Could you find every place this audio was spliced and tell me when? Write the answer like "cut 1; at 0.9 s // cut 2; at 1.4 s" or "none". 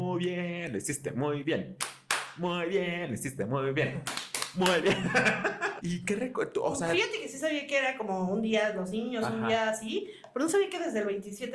cut 1; at 5.8 s